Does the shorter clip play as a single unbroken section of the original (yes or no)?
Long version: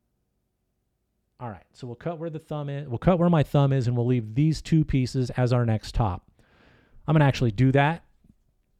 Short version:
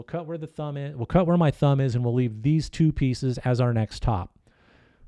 yes